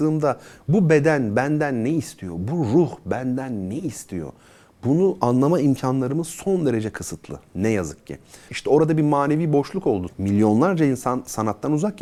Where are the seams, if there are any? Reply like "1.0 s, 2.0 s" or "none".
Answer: 8.5 s, 10.1 s